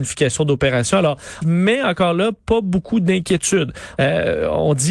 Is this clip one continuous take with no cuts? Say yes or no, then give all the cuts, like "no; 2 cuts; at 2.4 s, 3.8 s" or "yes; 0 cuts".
no; 2 cuts; at 1.4 s, 4.0 s